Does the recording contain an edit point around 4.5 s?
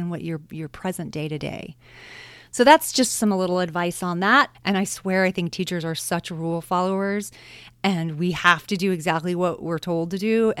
yes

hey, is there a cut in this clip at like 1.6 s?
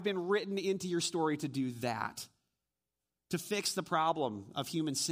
no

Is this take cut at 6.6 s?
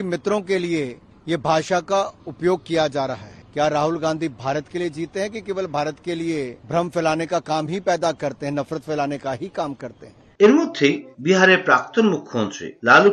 yes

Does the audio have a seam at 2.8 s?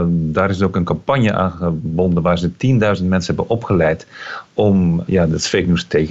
no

